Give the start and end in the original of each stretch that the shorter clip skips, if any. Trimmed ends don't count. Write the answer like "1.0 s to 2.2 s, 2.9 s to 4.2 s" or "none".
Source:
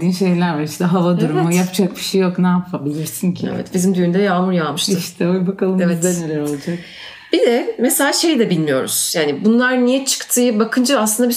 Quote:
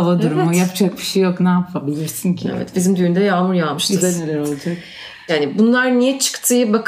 5.0 s to 6.0 s, 7.3 s to 9.1 s